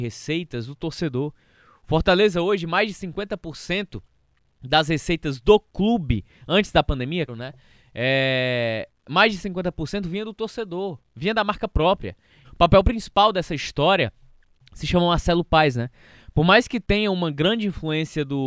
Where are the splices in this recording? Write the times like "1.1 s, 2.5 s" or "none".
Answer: 7.3 s, 12.4 s

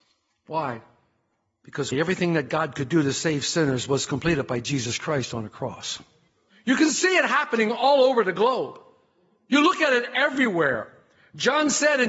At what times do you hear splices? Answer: 1.9 s, 6.5 s

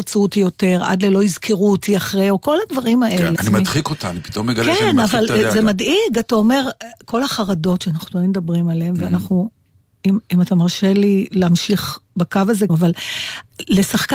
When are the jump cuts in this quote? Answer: 3.4 s, 12.7 s

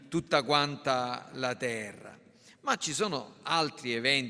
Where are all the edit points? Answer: none

